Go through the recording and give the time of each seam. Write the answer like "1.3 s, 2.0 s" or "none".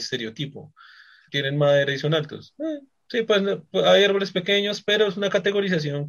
1.3 s